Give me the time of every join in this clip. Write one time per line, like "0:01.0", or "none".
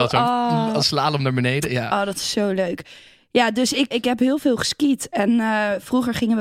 0:03.9